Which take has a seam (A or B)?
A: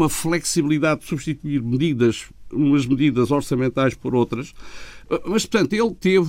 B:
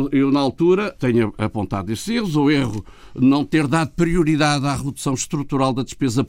B